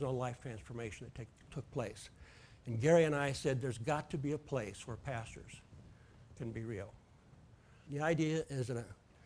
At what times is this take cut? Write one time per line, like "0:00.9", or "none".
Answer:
0:07.9